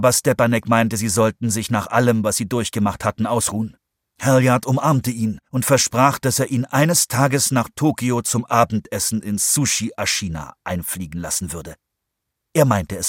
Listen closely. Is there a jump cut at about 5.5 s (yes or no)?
yes